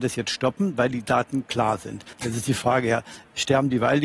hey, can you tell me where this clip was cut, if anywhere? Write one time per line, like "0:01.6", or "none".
0:02.1